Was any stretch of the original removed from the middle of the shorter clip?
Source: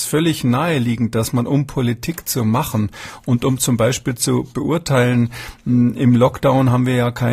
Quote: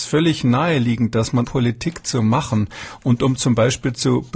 yes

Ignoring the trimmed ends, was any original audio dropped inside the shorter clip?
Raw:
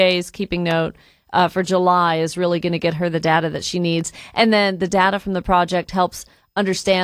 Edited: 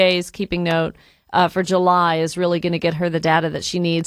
no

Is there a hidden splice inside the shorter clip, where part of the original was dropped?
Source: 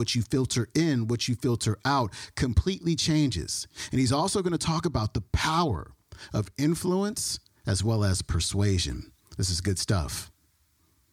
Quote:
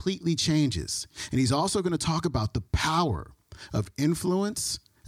no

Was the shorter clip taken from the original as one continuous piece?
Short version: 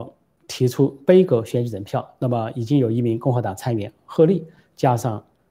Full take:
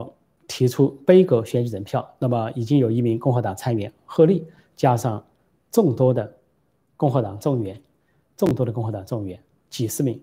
yes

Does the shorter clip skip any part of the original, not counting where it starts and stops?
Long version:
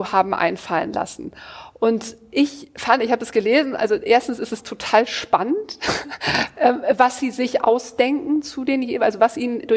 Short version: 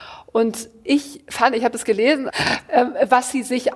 yes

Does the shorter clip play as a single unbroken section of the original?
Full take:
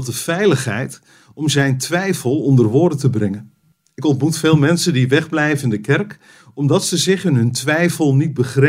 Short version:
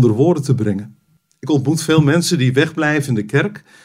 yes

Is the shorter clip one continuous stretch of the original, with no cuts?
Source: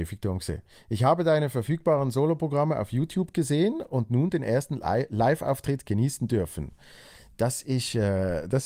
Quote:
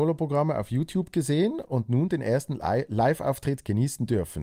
yes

